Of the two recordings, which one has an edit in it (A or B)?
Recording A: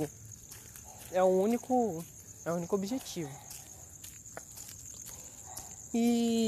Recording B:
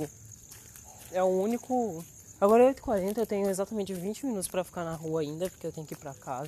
B